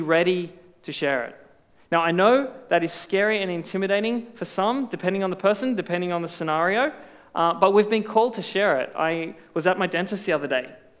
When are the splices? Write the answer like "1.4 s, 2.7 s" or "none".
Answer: none